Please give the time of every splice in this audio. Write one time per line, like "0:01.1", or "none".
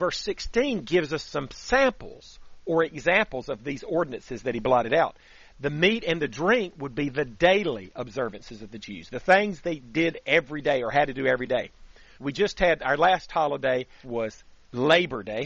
0:12.1
0:14.0

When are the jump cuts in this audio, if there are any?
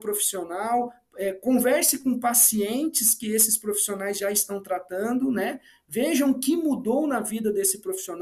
none

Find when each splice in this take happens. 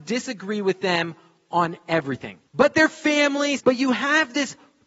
0:02.5
0:03.6

